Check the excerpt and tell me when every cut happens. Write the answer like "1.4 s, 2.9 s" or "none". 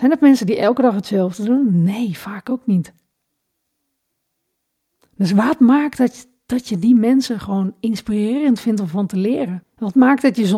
9.6 s